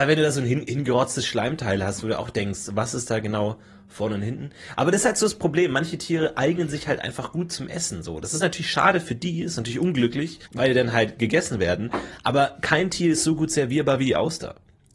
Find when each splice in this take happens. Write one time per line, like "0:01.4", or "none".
0:10.5